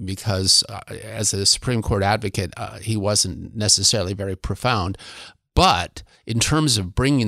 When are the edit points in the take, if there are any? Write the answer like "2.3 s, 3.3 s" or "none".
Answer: none